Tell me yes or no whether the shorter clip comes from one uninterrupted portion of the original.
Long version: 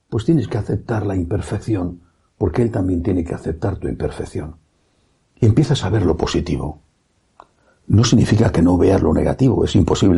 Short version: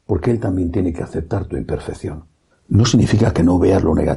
no